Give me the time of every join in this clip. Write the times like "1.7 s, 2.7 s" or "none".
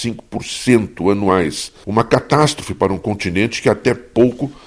1.8 s